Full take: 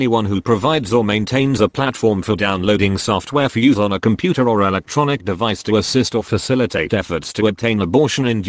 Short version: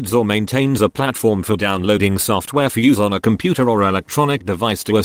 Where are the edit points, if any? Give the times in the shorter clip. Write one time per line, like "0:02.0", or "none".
none